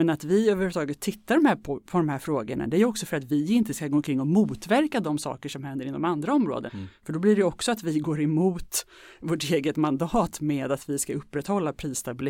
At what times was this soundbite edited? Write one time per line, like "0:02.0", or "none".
0:06.7

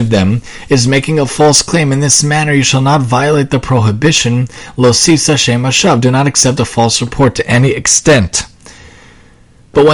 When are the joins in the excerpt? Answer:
none

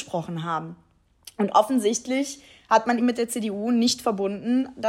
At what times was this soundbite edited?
0:03.0

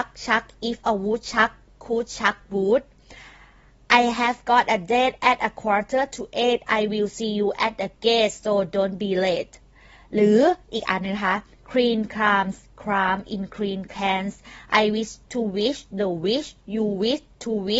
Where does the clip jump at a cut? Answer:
0:15.2

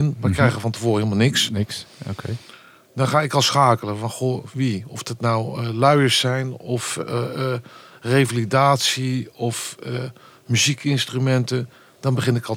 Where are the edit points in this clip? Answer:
none

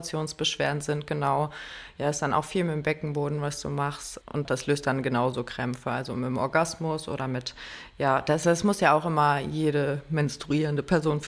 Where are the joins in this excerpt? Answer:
none

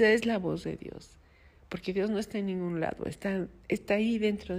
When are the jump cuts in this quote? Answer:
none

